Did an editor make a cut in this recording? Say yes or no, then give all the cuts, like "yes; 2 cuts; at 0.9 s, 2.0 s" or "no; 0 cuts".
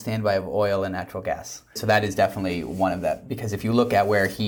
yes; 1 cut; at 1.8 s